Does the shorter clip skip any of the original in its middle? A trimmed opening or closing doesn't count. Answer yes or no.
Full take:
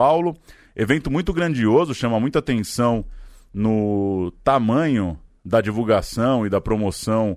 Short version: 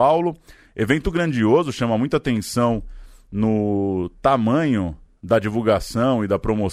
yes